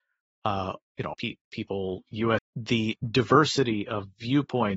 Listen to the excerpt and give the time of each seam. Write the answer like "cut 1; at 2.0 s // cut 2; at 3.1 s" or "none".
cut 1; at 1.1 s // cut 2; at 2.4 s